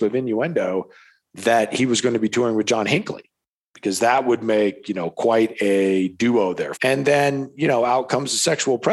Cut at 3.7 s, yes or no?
no